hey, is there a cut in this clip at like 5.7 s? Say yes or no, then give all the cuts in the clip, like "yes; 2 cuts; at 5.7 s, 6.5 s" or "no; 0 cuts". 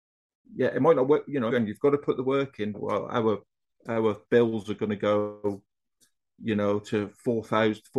no; 3 cuts; at 1.5 s, 2.7 s, 4.2 s